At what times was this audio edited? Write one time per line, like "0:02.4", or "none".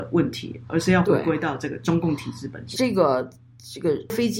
0:02.7